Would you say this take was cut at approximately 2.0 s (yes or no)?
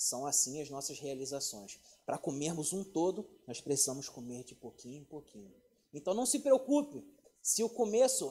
no